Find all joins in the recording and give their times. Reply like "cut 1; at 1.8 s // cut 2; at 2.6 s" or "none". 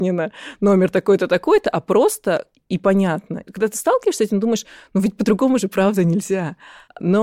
none

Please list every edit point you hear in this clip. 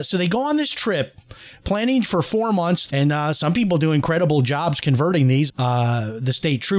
cut 1; at 2.9 s // cut 2; at 5.5 s

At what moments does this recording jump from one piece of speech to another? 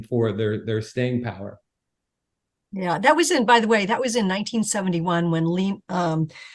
none

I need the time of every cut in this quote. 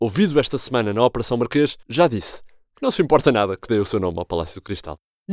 cut 1; at 1.8 s

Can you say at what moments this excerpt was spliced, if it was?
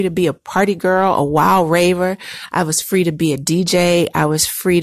none

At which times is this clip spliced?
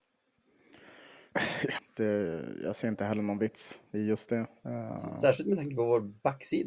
cut 1; at 1.8 s

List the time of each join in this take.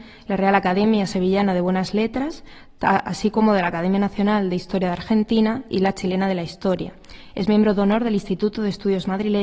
none

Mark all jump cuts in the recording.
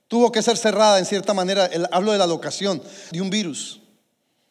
cut 1; at 3.1 s

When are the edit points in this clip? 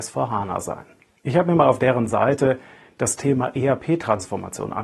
cut 1; at 1.2 s

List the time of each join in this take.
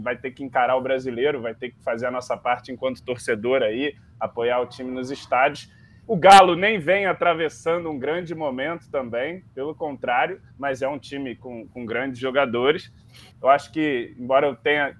cut 1; at 6.0 s // cut 2; at 13.3 s

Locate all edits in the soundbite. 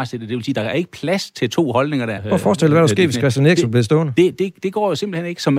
cut 1; at 2.2 s

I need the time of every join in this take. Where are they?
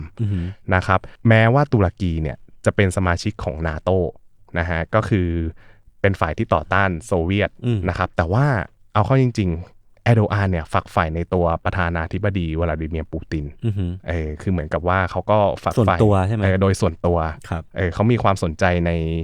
none

